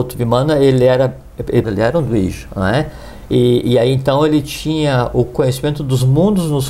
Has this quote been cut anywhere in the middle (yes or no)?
yes